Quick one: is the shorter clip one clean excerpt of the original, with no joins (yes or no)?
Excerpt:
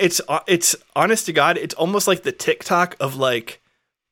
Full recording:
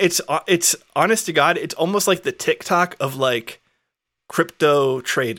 yes